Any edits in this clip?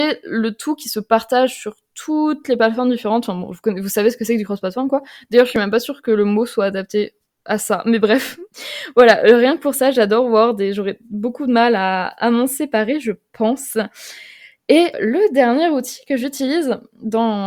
yes; 1 cut; at 14.9 s

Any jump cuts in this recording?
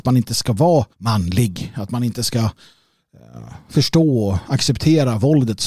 yes; 1 cut; at 0.9 s

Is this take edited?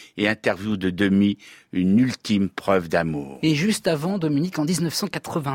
no; 0 cuts

